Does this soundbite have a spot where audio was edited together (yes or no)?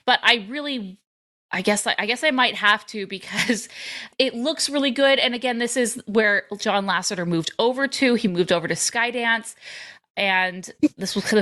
no